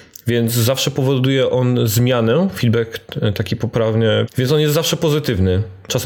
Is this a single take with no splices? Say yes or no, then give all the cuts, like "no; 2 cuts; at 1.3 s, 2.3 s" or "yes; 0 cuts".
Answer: no; 1 cut; at 4.3 s